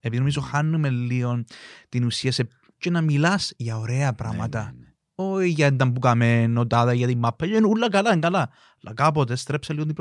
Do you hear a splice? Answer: yes; 1 cut; at 2.7 s

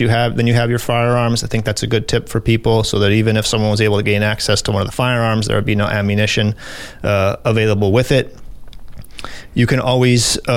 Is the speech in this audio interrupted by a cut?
no; 0 cuts

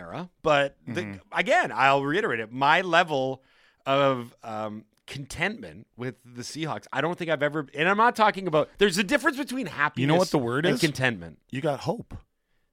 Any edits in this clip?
no; 0 cuts

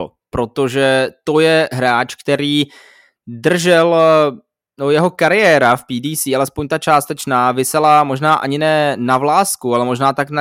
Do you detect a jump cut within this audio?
no; 0 cuts

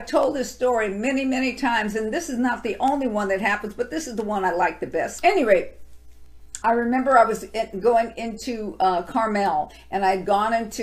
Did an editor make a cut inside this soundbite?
yes; 2 cuts; at 5.2 s, 6.6 s

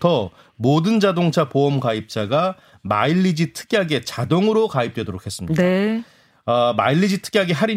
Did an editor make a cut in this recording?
no; 0 cuts

